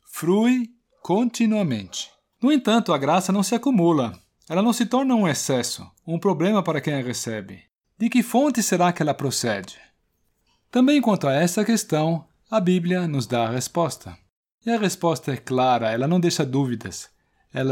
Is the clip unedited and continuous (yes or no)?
no